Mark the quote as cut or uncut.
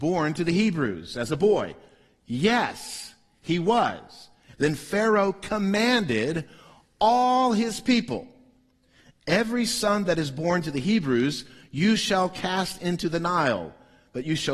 cut